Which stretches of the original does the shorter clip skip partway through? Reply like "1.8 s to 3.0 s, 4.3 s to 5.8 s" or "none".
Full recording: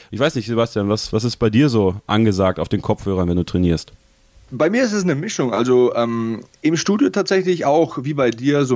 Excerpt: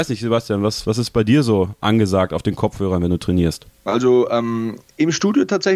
4.1 s to 5.5 s